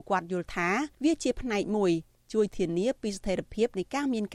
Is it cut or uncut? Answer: cut